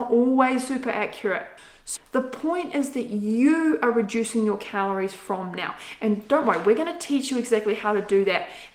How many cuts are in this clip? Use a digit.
1